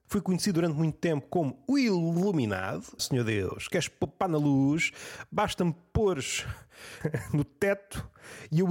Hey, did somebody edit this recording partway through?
yes; 1 cut; at 3.0 s

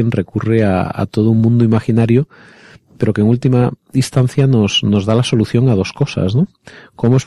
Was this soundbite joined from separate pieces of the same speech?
no; 0 cuts

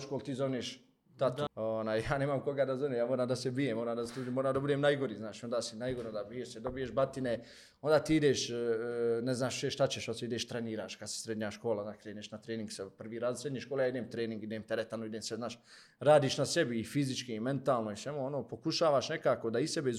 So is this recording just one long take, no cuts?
no; 1 cut; at 1.5 s

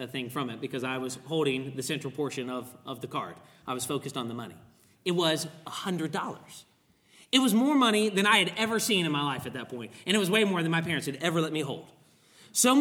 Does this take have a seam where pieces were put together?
no; 0 cuts

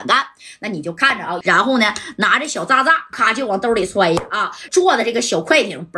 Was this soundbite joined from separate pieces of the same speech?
yes; 3 cuts; at 1.4 s, 3.1 s, 4.7 s

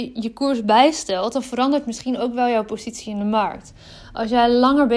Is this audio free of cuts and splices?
yes; 0 cuts

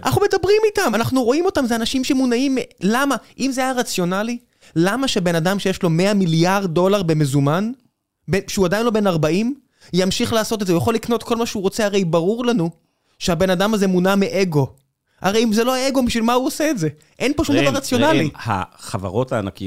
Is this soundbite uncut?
yes; 0 cuts

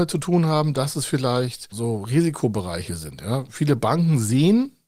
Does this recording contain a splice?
yes; 1 cut; at 1.7 s

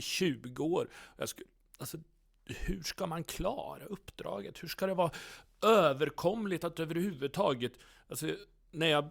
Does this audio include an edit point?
no; 0 cuts

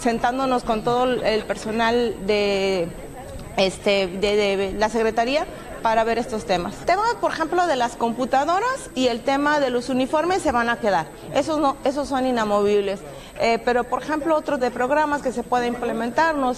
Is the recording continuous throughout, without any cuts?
no; 1 cut; at 14.6 s

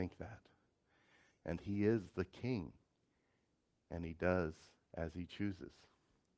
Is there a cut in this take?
yes; 1 cut; at 1.3 s

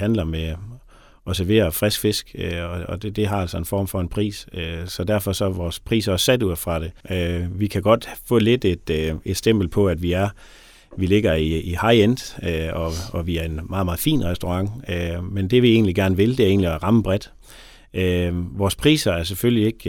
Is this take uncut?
no; 1 cut; at 7.0 s

